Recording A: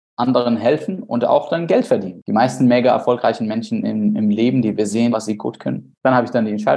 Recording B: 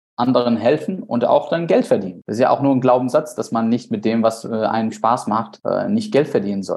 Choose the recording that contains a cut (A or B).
A